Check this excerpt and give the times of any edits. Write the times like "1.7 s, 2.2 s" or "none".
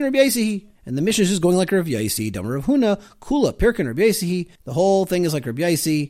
none